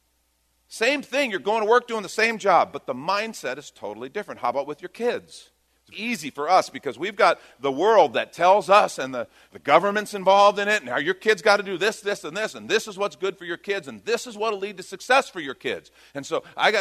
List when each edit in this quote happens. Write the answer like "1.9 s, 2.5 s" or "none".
5.9 s, 12.0 s